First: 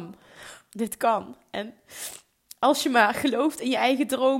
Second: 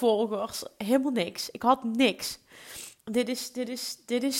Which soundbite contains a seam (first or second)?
second